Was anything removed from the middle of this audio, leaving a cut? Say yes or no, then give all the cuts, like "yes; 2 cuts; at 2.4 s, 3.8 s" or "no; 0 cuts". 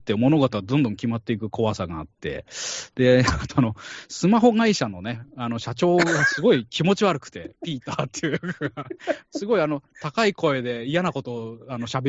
no; 0 cuts